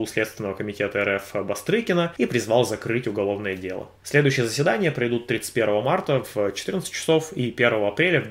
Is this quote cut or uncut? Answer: uncut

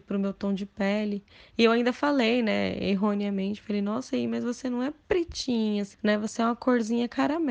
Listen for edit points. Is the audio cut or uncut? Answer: cut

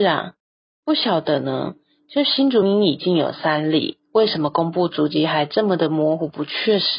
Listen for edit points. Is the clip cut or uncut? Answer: cut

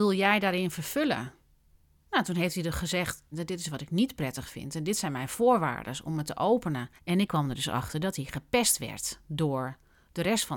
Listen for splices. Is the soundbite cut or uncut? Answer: cut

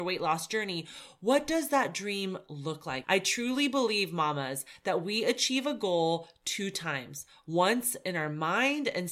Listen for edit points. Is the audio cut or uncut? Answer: cut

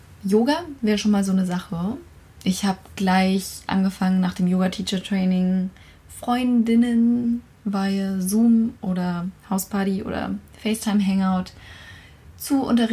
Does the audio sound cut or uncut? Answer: uncut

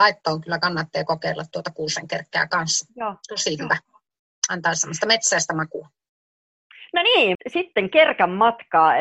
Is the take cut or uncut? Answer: cut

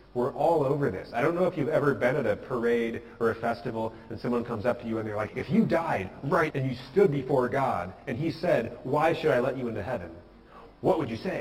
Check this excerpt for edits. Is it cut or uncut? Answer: cut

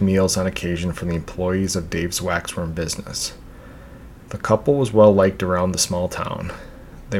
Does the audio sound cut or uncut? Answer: cut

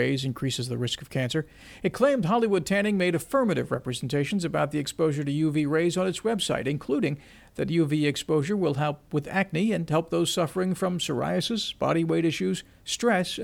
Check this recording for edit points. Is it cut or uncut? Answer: uncut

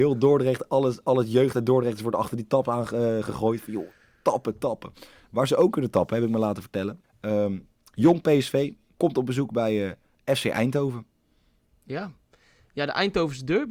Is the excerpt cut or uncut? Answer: cut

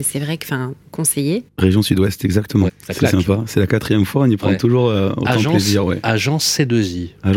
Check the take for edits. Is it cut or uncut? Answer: cut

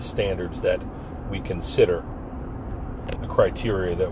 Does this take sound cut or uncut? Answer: cut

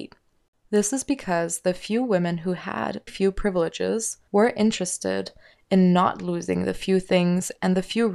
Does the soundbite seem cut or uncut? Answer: cut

